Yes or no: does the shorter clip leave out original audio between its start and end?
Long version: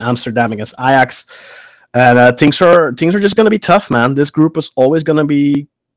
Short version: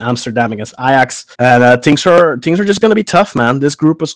yes